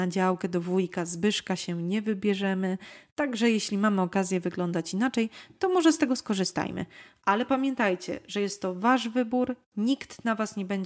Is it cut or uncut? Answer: uncut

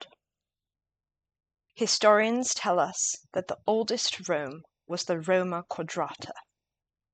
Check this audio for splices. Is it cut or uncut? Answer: cut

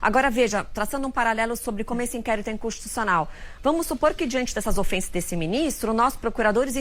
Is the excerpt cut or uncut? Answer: uncut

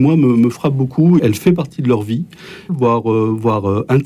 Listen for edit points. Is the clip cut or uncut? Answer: cut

